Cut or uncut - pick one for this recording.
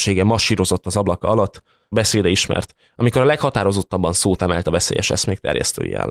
cut